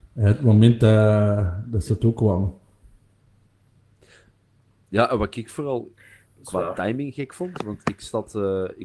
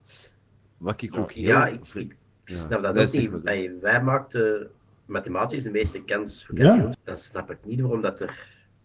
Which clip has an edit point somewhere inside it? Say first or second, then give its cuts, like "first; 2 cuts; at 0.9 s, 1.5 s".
second; 1 cut; at 6.9 s